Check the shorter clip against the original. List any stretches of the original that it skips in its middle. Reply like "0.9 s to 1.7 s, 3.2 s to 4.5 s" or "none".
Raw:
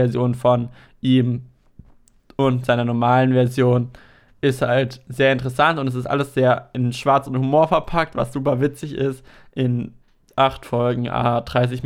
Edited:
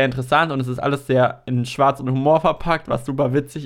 none